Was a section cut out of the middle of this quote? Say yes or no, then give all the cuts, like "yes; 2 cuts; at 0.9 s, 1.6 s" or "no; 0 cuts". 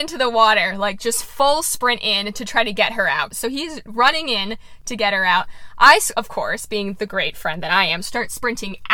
yes; 1 cut; at 3.3 s